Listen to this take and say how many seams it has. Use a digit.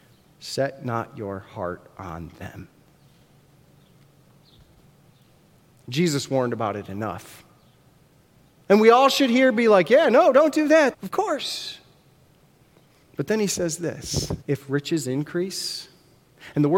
3